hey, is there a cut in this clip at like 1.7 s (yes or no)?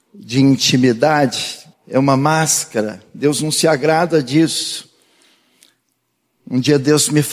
yes